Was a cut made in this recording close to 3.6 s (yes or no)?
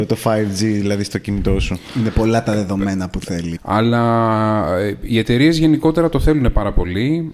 yes